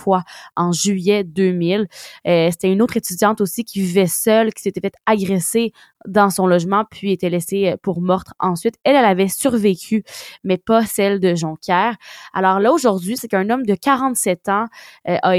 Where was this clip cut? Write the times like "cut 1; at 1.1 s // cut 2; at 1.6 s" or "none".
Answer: cut 1; at 13.2 s